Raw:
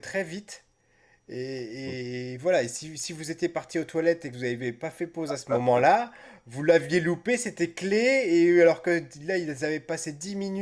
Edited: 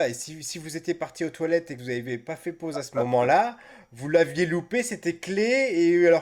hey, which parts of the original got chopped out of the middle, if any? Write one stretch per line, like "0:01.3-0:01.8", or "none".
none